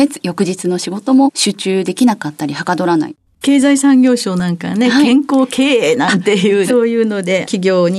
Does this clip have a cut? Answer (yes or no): yes